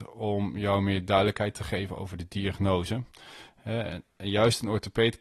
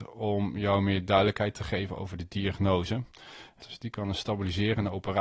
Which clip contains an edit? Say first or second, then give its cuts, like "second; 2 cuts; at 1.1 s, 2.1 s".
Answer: second; 1 cut; at 3.6 s